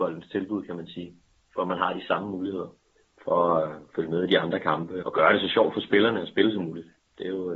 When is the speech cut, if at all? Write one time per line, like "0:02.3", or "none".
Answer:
0:05.0